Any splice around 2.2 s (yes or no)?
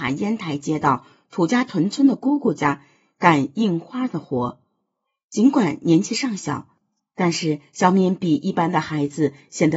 no